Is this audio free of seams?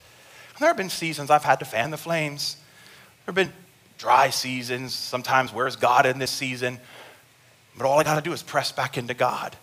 yes; 0 cuts

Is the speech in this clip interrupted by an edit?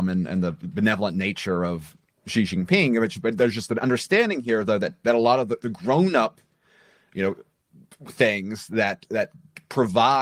no; 0 cuts

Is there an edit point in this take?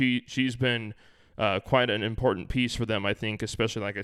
no; 0 cuts

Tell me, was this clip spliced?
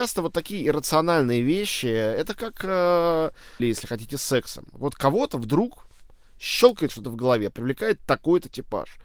yes; 1 cut; at 3.6 s

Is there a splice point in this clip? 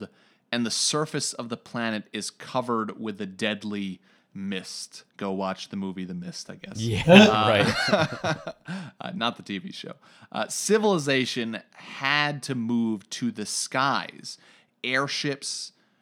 yes; 1 cut; at 5.1 s

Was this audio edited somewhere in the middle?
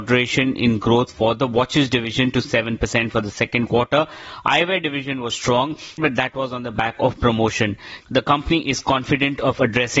yes; 2 cuts; at 6.0 s, 8.0 s

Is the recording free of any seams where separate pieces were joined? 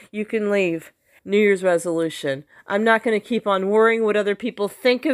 no; 1 cut; at 1.2 s

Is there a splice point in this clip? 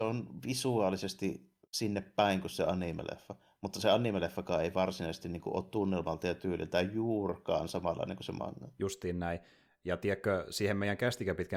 no; 0 cuts

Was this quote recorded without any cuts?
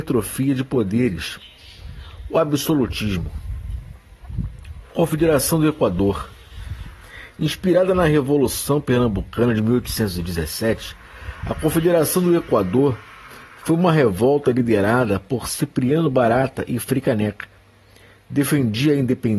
yes; 0 cuts

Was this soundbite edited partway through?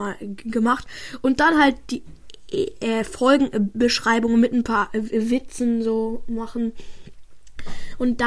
no; 0 cuts

